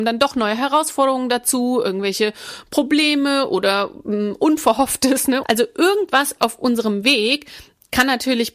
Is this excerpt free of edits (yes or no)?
no